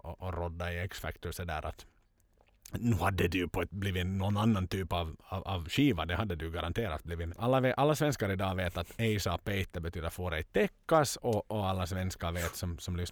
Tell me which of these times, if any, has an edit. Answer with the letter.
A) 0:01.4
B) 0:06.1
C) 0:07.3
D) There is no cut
C